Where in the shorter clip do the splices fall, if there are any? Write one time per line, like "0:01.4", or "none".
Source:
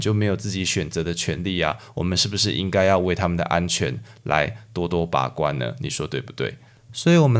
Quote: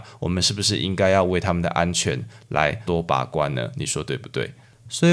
0:02.9